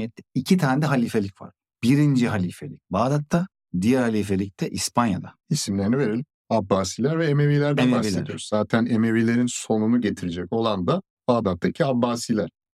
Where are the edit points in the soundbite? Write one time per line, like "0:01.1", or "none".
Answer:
0:05.4